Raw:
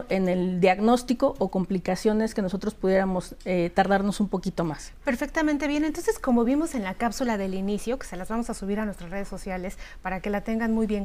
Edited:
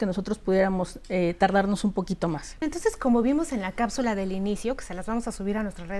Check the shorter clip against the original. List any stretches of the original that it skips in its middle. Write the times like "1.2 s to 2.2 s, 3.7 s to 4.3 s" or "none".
5.0 s to 5.8 s